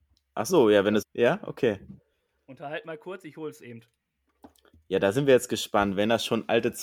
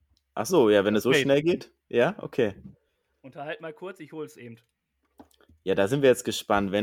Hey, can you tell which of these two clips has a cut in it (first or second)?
first